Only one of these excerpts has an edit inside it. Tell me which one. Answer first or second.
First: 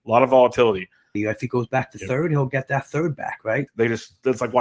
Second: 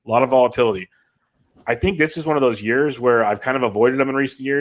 first